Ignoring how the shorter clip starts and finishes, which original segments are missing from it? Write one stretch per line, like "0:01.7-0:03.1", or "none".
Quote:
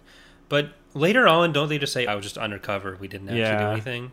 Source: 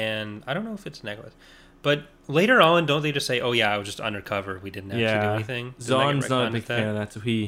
0:03.4-0:03.7